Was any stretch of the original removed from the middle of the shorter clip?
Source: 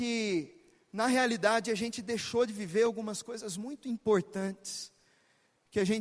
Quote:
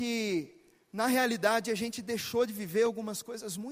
no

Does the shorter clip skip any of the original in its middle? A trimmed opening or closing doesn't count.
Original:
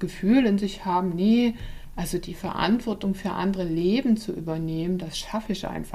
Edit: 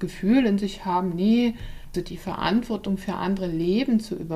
yes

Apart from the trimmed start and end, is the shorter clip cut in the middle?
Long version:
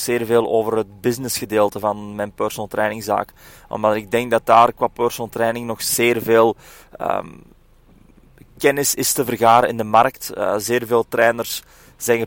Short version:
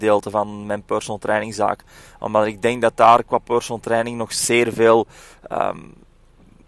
no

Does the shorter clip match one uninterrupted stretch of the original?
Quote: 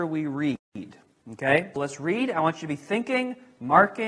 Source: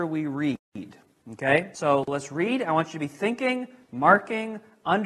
no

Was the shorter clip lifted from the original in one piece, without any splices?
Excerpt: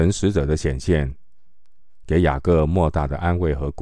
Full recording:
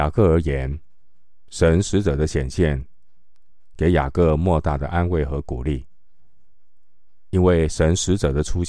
yes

